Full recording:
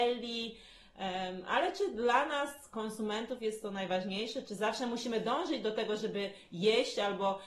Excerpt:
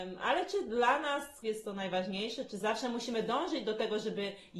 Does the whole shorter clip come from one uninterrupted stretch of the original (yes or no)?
no